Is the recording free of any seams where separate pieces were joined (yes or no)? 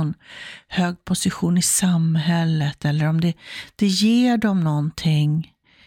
yes